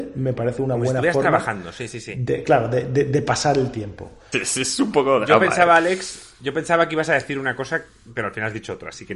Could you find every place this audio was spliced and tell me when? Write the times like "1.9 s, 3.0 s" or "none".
4.3 s